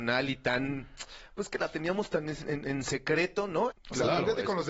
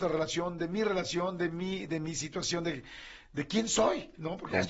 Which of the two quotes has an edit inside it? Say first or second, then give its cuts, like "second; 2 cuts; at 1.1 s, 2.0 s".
first; 1 cut; at 3.7 s